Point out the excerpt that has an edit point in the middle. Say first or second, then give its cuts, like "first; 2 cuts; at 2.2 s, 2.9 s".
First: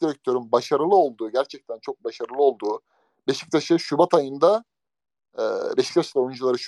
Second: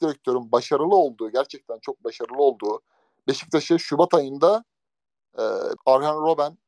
second; 1 cut; at 5.8 s